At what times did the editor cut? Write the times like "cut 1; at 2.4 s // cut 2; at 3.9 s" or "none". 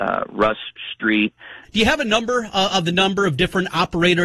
cut 1; at 1.6 s